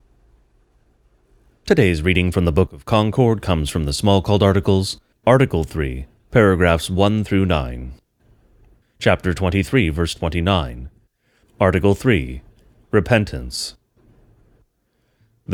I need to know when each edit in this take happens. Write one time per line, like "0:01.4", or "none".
0:05.1
0:08.8
0:11.4